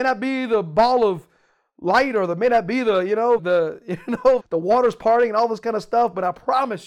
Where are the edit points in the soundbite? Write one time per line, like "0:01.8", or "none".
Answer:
0:03.4
0:04.4